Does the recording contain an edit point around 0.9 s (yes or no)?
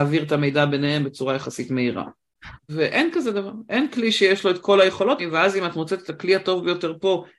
no